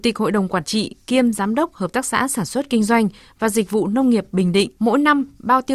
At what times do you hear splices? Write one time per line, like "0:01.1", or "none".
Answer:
0:04.8